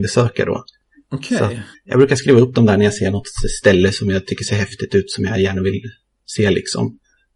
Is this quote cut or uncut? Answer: cut